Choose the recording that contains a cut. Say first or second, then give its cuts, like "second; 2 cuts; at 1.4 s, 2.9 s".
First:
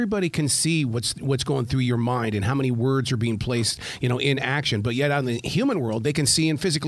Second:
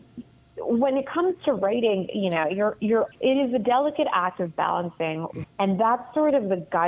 second; 2 cuts; at 3.1 s, 5.4 s